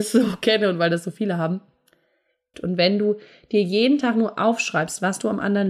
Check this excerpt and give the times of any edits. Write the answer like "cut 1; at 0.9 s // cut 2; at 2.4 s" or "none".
cut 1; at 2.5 s